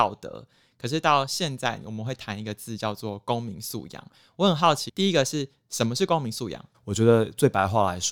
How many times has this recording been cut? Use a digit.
2